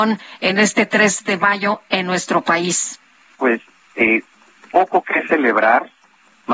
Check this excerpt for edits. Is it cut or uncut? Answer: cut